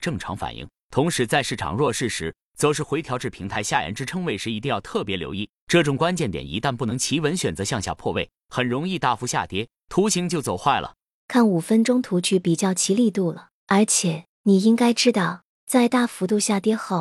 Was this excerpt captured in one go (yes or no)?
no